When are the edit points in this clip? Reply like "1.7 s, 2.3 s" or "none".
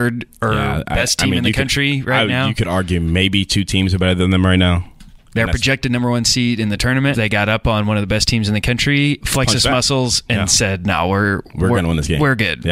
7.1 s, 9.2 s